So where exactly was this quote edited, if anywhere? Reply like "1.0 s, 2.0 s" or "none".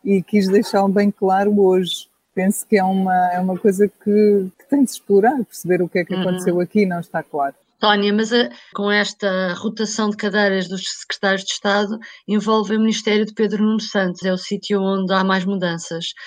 4.5 s, 8.7 s, 14.2 s